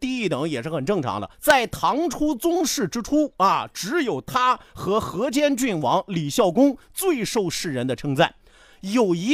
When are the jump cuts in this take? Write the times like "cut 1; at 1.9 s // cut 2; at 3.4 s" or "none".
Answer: cut 1; at 1.3 s